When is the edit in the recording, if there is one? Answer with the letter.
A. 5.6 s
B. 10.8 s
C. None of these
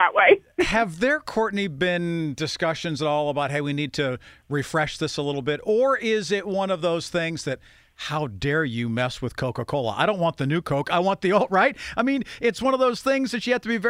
C